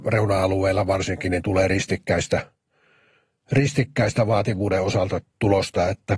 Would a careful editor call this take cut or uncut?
uncut